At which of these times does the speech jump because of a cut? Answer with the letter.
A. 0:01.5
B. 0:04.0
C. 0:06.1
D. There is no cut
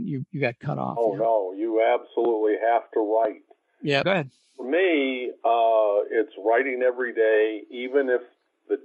B